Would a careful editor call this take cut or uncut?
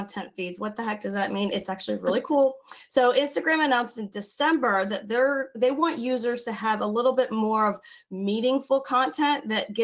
uncut